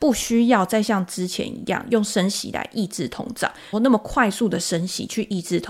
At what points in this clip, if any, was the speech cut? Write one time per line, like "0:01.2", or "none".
0:03.7